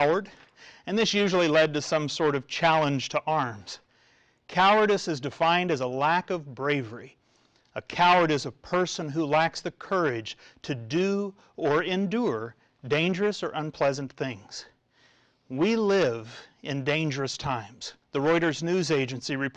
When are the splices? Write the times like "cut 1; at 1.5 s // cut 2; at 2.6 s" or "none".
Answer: cut 1; at 18.0 s